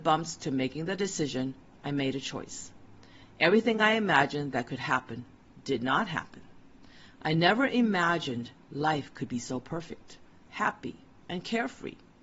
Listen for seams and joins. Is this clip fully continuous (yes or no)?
yes